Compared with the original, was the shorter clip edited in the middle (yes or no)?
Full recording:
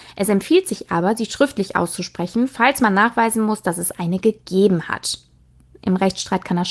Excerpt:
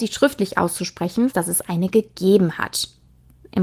yes